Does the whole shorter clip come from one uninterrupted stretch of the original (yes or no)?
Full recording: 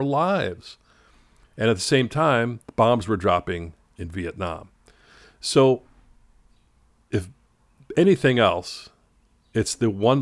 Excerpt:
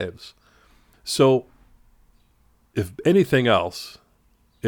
no